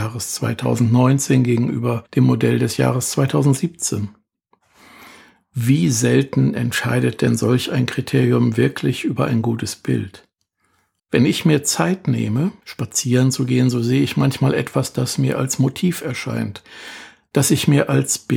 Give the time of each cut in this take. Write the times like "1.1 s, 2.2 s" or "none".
11.0 s